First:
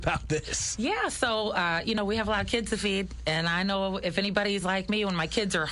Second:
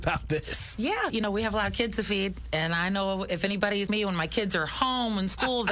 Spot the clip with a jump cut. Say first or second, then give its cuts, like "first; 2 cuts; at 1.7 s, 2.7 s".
second; 2 cuts; at 1.1 s, 3.9 s